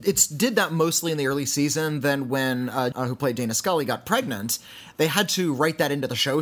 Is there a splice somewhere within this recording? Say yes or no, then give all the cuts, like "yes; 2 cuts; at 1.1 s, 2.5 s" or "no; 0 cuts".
yes; 1 cut; at 2.9 s